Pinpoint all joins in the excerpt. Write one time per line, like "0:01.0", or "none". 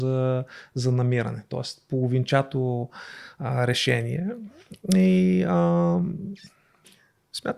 none